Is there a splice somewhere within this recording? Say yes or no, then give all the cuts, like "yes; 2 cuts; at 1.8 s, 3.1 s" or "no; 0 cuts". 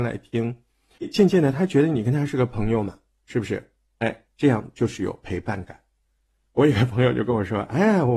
no; 0 cuts